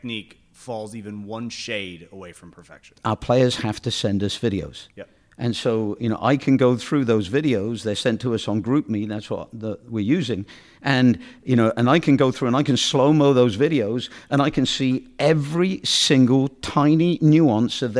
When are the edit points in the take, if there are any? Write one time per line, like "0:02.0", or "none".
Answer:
none

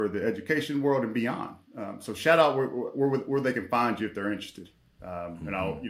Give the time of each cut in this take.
0:05.0

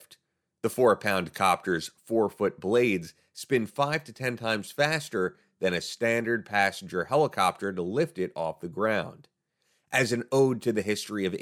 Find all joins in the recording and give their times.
none

